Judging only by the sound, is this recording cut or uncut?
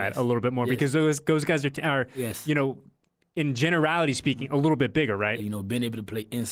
cut